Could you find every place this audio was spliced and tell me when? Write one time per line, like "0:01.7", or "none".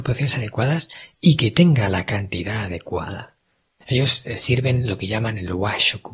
0:03.8